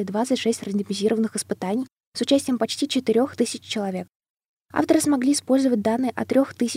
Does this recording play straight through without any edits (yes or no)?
yes